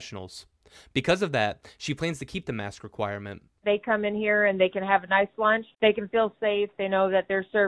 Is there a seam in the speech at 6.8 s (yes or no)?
no